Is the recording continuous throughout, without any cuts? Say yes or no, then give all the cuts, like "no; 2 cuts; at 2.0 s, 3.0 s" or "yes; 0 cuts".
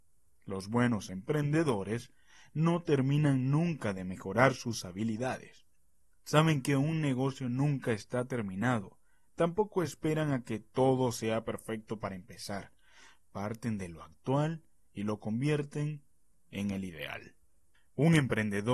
yes; 0 cuts